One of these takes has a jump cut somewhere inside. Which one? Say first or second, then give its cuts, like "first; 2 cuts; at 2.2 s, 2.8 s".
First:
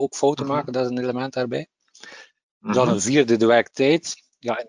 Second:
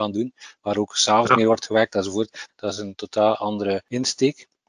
second; 1 cut; at 2.5 s